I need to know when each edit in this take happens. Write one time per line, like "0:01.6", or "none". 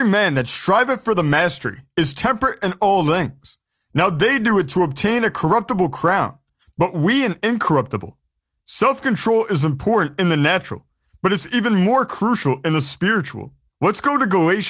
0:13.7